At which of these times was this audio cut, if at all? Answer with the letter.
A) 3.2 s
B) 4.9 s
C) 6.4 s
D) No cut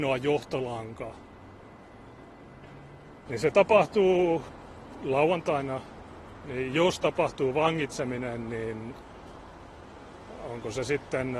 A